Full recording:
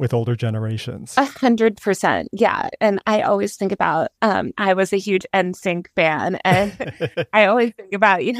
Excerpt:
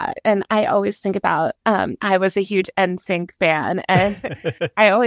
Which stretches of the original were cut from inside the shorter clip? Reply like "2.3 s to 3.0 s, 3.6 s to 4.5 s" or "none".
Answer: none